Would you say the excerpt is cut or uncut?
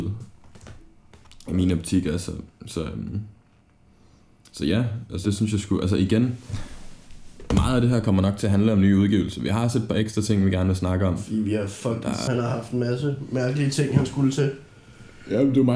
cut